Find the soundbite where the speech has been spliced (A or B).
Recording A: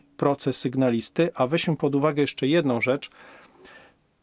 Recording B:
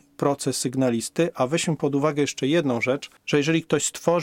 B